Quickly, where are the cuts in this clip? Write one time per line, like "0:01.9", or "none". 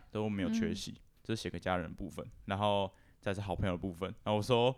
0:01.2